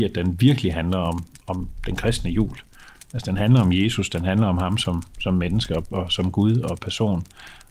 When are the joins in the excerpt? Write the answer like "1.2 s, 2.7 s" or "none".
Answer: none